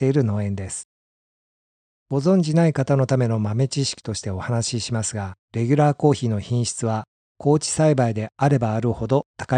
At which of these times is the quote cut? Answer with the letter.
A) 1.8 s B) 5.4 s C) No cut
B